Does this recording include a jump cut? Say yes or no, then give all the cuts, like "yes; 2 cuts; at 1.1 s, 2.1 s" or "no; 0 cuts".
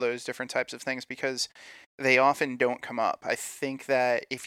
no; 0 cuts